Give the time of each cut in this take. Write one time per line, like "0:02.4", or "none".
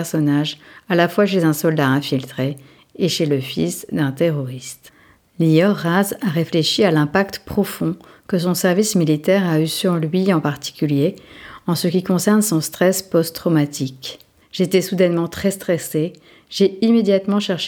0:14.4